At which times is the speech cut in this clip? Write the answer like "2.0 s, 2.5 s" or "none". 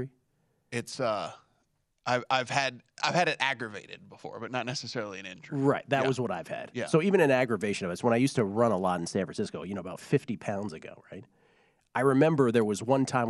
none